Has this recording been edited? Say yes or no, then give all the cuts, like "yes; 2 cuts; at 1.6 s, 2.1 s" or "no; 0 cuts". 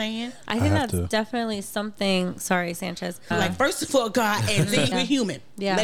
yes; 2 cuts; at 3.3 s, 4.9 s